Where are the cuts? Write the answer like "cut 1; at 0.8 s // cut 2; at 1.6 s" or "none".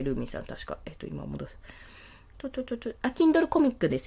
none